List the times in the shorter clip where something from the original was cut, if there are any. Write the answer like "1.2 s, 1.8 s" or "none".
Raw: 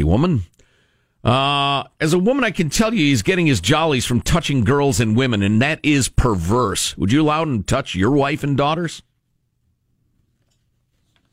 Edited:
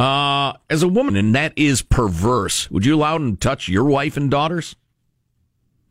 1.1 s